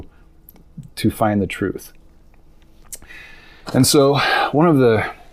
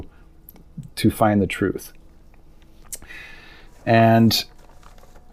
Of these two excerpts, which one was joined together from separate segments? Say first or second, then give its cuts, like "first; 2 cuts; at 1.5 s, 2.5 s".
first; 1 cut; at 3.7 s